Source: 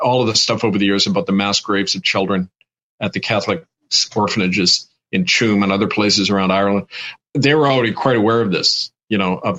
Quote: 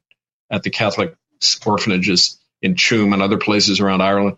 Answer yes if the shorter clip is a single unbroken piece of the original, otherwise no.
yes